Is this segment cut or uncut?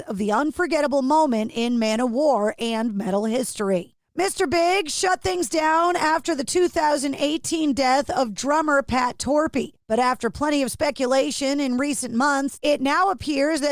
uncut